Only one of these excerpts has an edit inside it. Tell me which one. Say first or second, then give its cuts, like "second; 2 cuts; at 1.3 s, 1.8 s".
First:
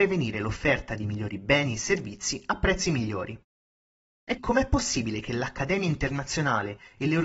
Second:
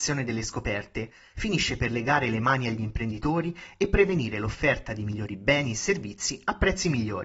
first; 1 cut; at 4.4 s